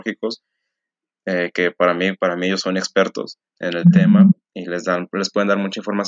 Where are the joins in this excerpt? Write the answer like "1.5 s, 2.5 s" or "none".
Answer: 2.1 s, 3.5 s